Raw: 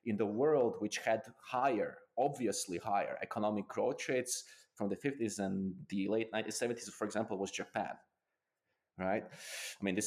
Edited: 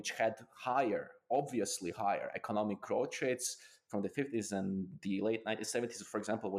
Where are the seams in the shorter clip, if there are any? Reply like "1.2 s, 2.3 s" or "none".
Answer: none